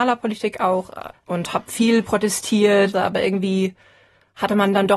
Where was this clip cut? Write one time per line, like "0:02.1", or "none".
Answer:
0:01.1
0:02.9